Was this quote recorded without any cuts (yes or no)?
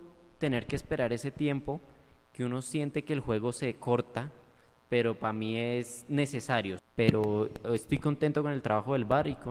no